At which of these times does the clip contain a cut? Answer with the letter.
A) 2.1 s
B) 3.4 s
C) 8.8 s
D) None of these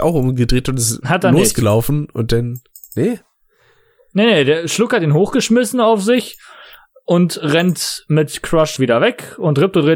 C